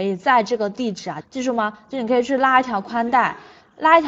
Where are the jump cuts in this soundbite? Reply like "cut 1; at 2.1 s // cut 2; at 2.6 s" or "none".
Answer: cut 1; at 1.2 s